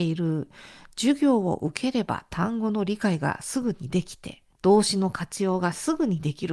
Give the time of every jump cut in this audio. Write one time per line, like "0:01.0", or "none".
0:04.5